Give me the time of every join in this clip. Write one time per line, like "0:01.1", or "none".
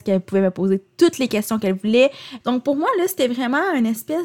0:02.4